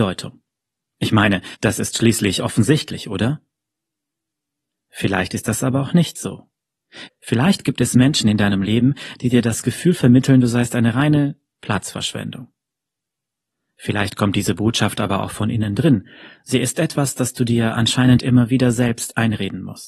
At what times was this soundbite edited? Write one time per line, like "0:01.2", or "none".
0:07.1